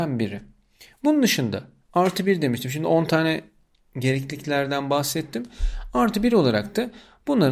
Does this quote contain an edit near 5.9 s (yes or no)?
no